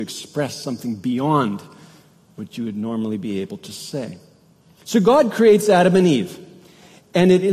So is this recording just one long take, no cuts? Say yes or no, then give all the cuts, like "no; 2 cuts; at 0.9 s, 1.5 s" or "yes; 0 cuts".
yes; 0 cuts